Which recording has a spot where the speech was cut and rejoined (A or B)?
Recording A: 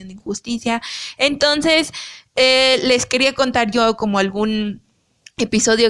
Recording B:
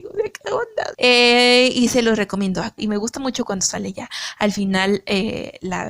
B